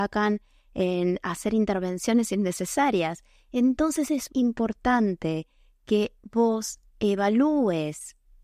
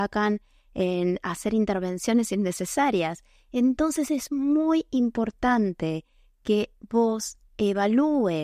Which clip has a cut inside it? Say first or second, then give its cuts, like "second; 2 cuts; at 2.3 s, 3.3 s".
first; 1 cut; at 4.3 s